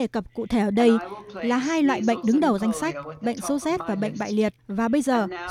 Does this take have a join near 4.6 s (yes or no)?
yes